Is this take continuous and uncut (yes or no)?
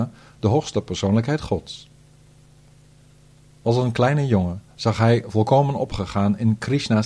yes